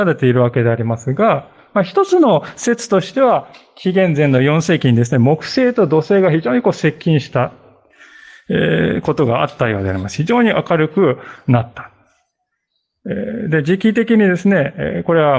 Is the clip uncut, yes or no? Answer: yes